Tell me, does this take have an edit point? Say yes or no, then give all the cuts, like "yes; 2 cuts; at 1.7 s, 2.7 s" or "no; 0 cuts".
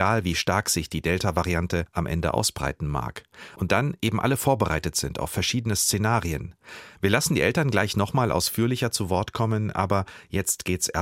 no; 0 cuts